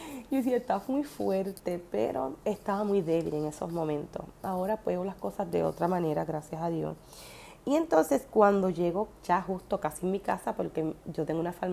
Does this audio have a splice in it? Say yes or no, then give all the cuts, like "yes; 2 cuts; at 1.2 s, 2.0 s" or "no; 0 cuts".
no; 0 cuts